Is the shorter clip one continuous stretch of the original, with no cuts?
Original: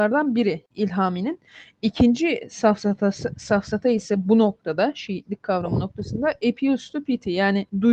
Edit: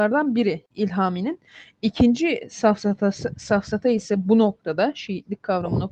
yes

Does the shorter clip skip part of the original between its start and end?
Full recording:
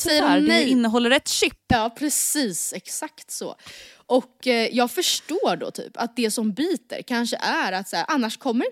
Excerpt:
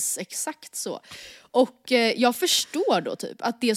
no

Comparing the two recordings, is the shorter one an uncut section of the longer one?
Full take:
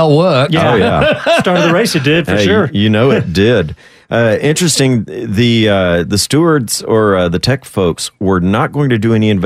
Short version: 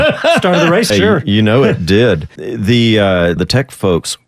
no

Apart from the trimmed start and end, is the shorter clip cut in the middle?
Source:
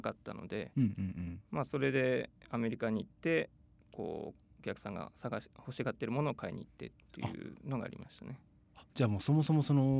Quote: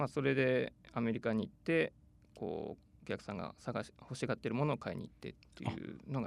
no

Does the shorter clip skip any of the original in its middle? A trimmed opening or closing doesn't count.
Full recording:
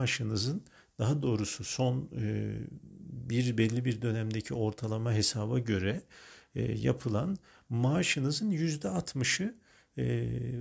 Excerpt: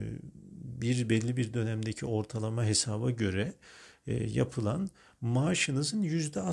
no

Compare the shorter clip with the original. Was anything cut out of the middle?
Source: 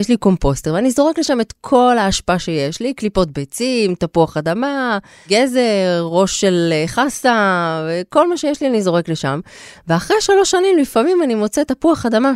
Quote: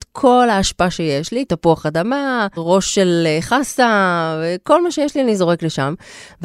yes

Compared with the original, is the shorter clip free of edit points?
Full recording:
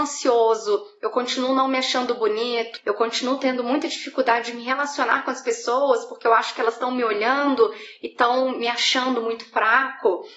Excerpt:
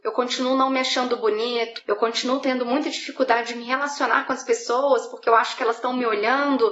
yes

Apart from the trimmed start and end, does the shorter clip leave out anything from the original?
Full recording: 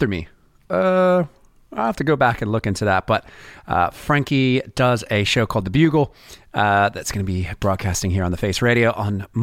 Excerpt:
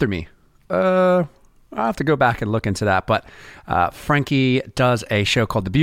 no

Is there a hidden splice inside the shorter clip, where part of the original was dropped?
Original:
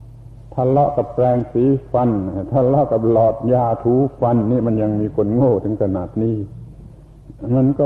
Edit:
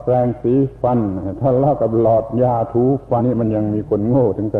yes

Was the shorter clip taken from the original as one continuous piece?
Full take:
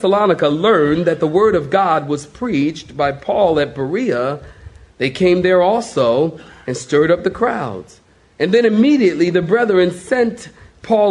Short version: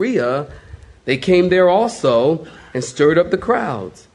yes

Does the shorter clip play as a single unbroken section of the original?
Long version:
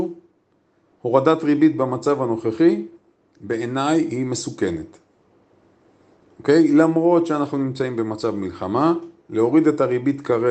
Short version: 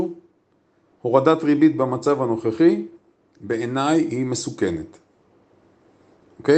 yes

